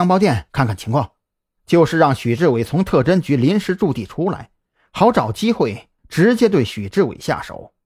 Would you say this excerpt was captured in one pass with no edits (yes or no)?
no